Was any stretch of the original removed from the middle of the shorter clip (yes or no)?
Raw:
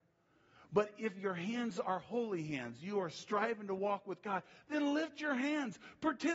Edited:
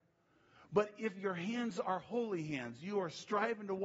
no